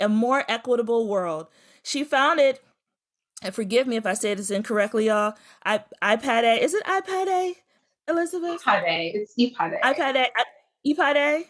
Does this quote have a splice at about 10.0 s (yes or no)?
no